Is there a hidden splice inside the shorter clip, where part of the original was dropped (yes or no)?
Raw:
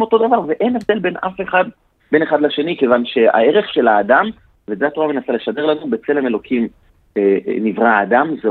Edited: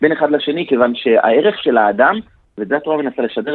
no